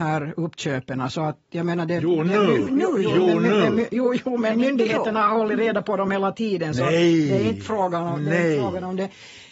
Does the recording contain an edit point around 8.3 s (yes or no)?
no